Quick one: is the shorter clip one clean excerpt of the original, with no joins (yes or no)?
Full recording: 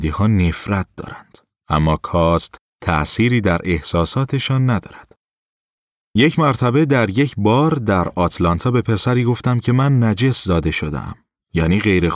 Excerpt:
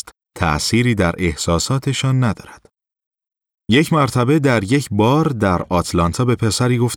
yes